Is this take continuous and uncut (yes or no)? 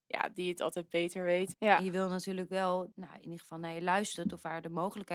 no